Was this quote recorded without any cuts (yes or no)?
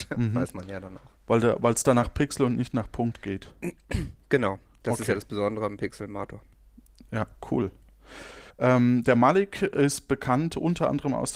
no